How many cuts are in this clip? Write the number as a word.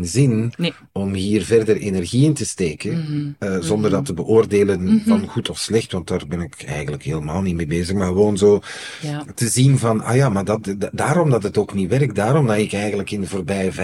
zero